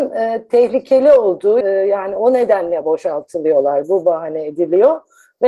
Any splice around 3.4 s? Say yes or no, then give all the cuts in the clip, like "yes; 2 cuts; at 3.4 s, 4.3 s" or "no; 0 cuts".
no; 1 cut; at 1.6 s